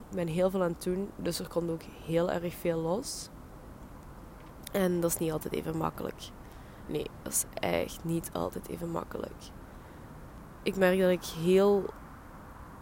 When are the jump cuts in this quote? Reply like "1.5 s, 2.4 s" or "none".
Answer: none